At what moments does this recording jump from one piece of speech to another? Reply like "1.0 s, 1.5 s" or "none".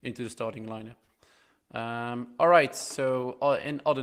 none